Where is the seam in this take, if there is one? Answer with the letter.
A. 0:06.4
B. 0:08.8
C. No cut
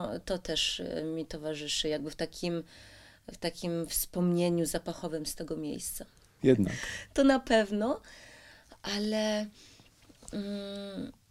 A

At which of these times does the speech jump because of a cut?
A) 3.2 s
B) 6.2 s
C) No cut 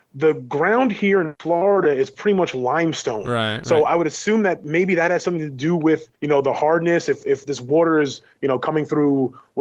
B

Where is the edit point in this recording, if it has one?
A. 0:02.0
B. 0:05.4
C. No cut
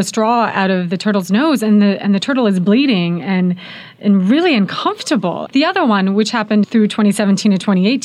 B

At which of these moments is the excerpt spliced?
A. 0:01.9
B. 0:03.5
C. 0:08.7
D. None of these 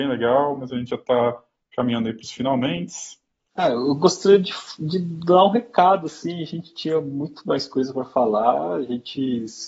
B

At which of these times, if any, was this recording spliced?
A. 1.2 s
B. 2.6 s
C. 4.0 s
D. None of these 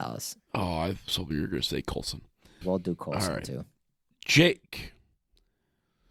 B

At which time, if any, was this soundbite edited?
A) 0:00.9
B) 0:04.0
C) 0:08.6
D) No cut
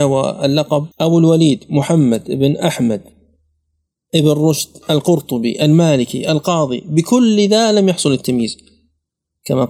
A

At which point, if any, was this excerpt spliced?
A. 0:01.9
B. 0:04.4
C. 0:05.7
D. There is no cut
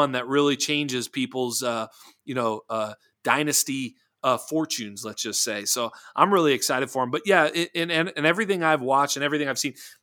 D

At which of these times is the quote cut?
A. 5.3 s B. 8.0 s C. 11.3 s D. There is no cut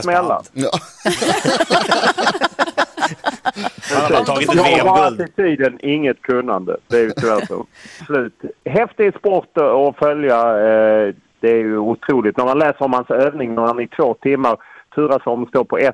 B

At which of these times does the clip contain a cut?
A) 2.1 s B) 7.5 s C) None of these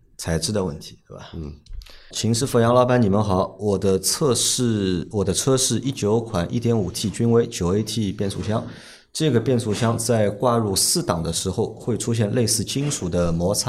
A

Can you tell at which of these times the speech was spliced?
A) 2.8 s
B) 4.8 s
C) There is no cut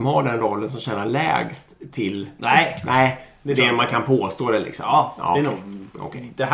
C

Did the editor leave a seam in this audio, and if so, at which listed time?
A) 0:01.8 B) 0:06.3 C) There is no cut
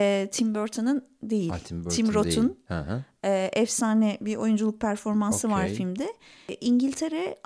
C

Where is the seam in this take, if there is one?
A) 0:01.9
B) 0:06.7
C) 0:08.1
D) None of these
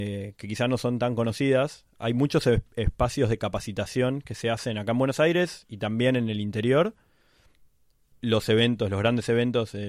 C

